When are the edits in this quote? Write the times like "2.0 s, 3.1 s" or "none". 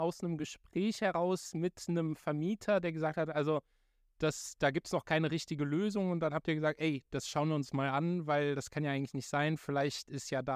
none